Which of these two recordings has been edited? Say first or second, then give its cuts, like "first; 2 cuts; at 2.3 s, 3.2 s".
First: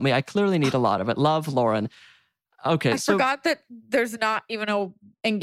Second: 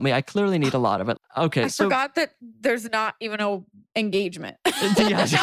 second; 1 cut; at 1.2 s